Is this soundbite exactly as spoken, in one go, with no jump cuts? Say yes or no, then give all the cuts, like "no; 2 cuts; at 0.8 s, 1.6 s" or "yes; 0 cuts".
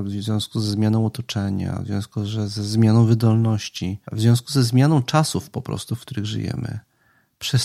no; 1 cut; at 4.0 s